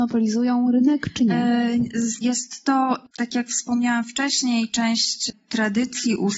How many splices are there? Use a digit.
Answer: 1